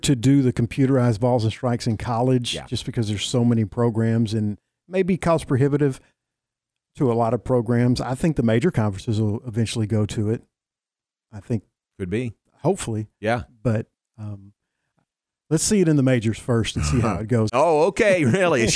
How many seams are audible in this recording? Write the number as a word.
one